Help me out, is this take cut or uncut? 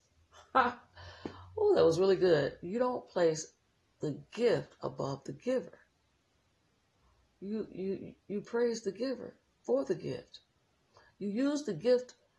uncut